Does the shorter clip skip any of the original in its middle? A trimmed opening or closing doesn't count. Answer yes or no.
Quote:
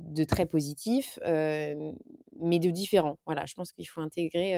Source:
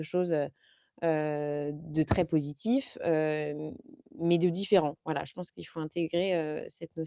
no